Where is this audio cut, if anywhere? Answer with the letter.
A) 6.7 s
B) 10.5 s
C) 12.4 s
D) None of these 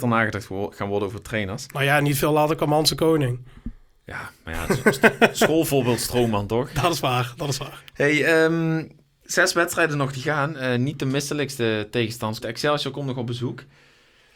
C